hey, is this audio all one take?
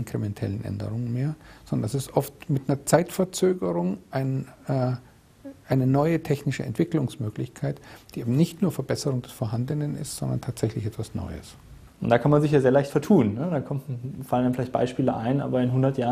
no; 1 cut; at 11.9 s

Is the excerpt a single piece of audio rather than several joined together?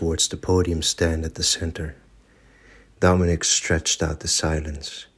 no; 1 cut; at 2.9 s

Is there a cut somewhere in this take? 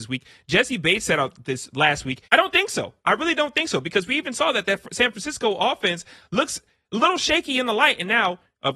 yes; 1 cut; at 2.2 s

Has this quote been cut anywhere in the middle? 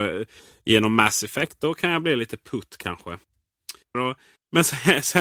yes; 1 cut; at 3.9 s

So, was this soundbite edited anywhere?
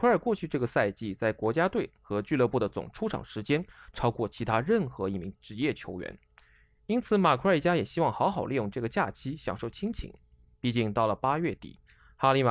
no; 0 cuts

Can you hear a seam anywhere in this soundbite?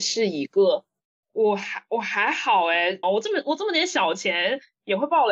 yes; 2 cuts; at 1.2 s, 3.0 s

